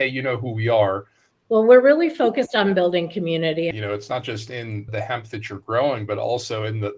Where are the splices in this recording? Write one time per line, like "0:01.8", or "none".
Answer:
0:01.3
0:03.7
0:04.9